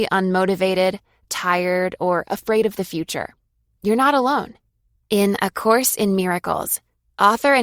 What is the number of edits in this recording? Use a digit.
1